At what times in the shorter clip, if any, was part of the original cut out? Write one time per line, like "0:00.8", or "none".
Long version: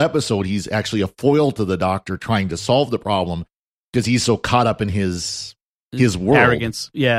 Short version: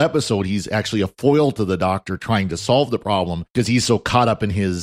0:03.5